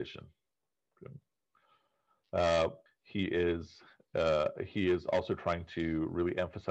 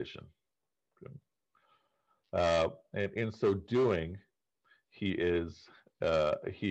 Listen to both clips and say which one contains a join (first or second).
first